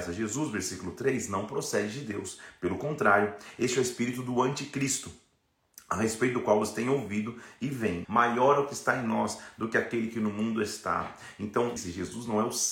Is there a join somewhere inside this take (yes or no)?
yes